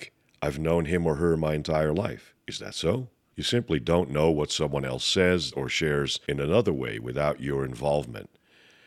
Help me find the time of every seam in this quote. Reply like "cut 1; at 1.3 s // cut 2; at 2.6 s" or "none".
cut 1; at 3.3 s // cut 2; at 5.5 s